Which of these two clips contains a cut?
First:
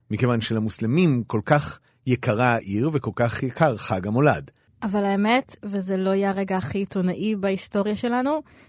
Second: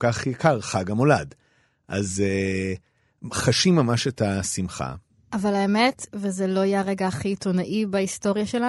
first; 1 cut; at 4.7 s

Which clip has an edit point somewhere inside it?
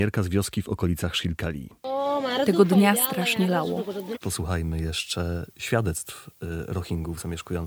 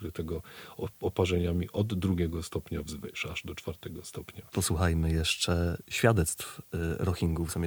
first; 1 cut; at 4.2 s

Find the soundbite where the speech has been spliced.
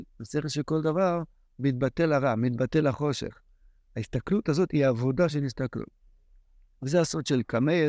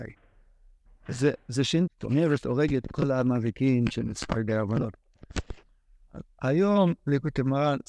second; 2 cuts; at 1.9 s, 6.2 s

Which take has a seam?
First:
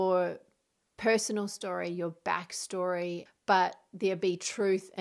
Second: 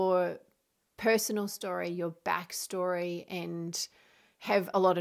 first; 1 cut; at 3.3 s

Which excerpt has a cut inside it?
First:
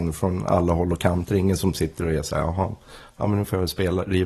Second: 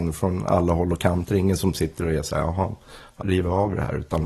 second; 1 cut; at 3.2 s

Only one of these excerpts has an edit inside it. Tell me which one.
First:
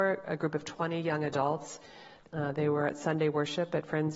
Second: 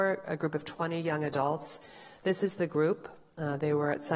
first; 1 cut; at 2.2 s

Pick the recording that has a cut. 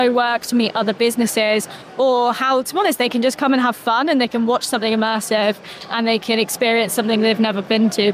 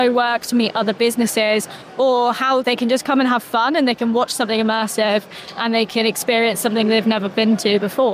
second; 1 cut; at 2.6 s

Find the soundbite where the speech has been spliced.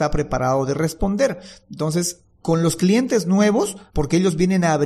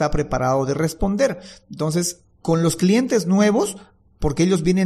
first; 1 cut; at 3.9 s

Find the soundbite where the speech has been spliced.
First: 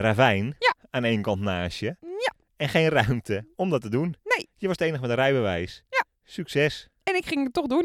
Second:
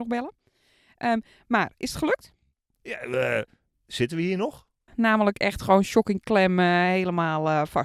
second; 1 cut; at 4.9 s

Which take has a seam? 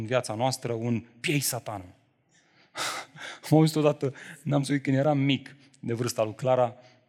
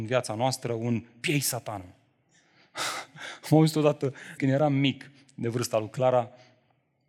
second; 1 cut; at 4.4 s

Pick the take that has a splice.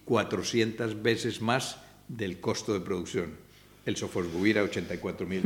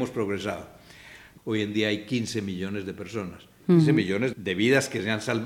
second; 2 cuts; at 1.4 s, 4.3 s

